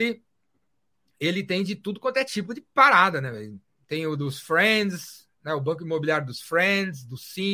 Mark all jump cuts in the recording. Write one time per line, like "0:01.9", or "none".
none